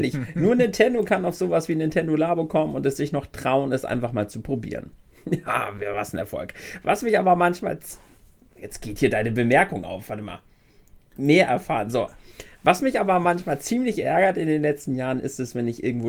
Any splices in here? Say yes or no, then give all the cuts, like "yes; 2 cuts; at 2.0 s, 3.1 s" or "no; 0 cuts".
no; 0 cuts